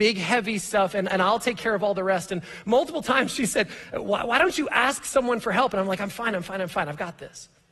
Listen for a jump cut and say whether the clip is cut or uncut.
uncut